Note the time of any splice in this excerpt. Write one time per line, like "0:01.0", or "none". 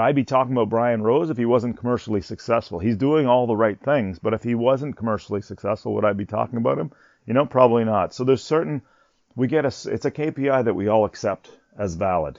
none